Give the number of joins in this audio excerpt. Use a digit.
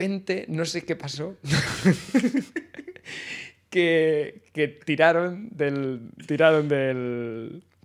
0